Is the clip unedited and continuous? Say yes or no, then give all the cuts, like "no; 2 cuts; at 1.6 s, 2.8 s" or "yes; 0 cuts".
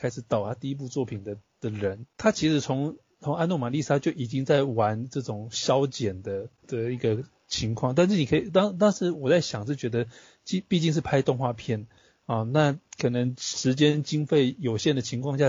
no; 1 cut; at 6.6 s